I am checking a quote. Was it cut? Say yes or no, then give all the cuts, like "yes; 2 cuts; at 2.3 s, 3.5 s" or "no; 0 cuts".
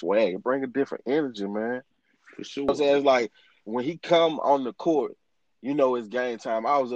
no; 0 cuts